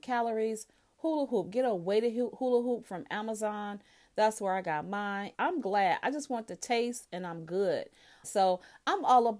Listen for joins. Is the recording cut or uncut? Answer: cut